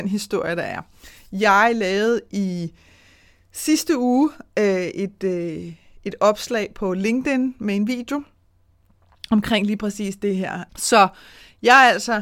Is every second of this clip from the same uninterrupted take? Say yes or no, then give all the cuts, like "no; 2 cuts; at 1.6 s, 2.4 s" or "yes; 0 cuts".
no; 1 cut; at 10.7 s